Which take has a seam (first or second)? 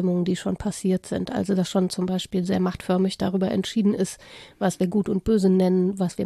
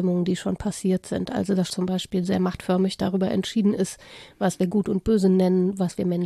second